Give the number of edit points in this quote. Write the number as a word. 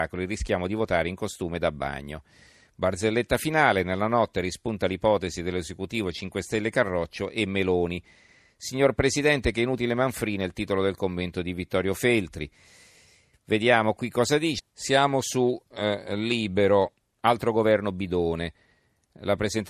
two